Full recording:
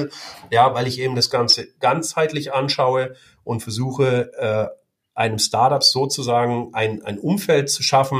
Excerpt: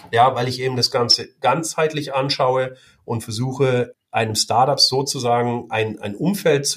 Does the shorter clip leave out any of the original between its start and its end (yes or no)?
yes